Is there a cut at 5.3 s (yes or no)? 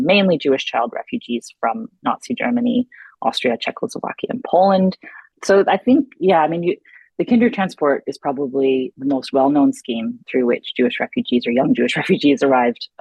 yes